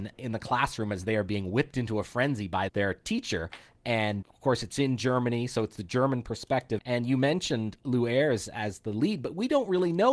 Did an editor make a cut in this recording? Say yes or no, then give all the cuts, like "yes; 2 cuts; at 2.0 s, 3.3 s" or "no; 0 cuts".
yes; 3 cuts; at 2.7 s, 4.2 s, 6.8 s